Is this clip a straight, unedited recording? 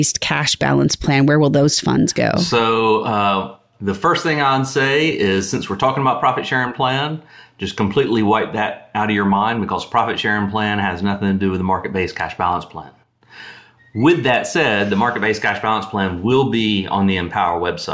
yes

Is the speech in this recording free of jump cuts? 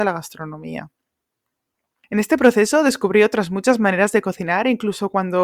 yes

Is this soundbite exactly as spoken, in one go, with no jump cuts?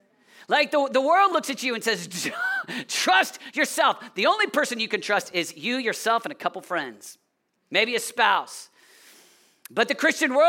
yes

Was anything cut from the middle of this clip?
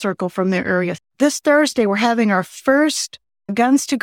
yes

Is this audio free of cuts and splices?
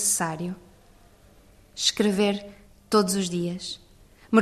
yes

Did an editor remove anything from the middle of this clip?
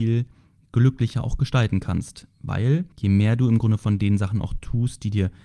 yes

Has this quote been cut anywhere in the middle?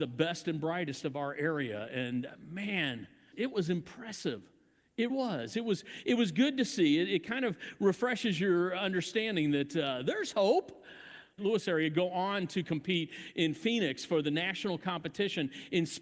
yes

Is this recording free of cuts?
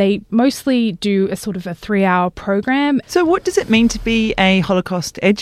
no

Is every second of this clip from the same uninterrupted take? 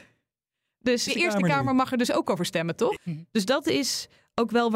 no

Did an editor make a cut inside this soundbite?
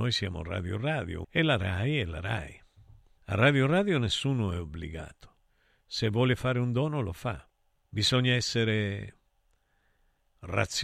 yes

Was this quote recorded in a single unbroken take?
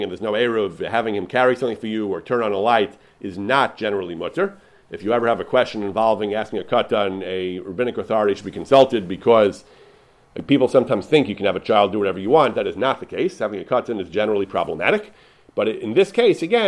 yes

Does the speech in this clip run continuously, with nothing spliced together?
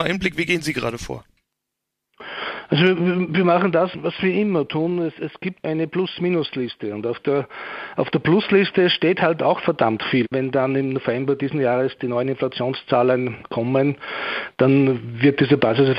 no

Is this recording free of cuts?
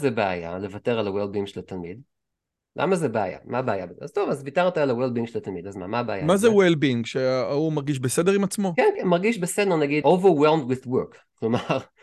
no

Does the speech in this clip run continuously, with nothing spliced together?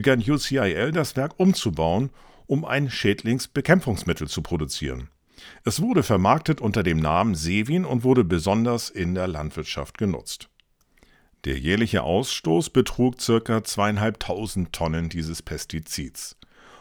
yes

